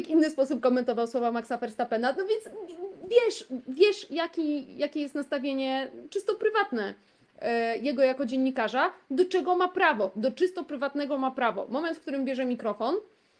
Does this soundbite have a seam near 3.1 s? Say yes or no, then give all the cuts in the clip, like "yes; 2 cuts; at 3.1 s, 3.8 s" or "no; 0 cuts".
no; 0 cuts